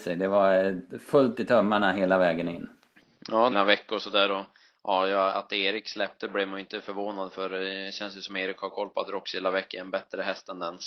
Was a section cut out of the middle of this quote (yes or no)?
yes